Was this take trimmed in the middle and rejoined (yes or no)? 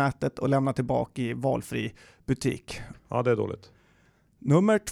yes